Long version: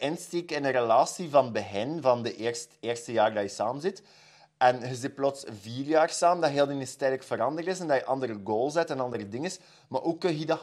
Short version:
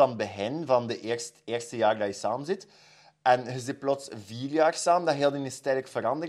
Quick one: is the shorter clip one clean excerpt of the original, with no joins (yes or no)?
yes